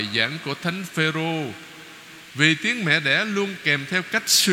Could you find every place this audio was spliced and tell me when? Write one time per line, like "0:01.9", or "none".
0:02.3